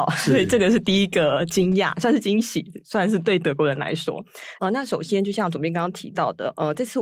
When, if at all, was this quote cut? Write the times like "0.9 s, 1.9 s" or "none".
4.6 s